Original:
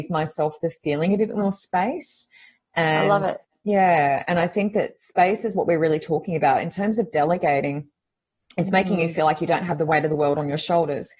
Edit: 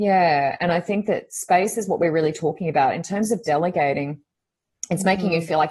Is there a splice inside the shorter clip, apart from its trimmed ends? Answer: no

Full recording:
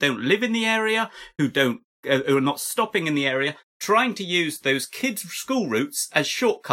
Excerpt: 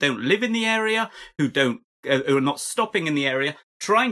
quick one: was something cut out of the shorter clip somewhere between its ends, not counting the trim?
no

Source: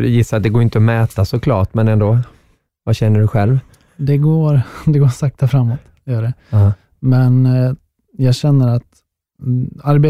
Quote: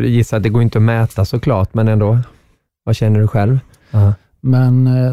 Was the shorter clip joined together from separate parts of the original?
yes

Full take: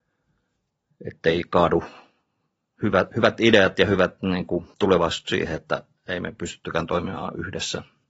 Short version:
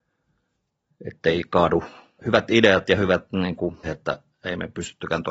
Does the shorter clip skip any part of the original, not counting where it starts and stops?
yes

